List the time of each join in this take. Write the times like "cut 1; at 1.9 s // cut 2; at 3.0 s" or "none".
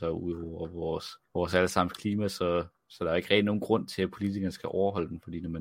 cut 1; at 1.2 s // cut 2; at 2.8 s